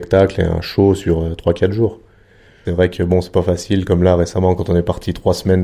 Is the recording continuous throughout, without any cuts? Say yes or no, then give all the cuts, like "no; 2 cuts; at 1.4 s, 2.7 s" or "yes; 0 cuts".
no; 1 cut; at 2.6 s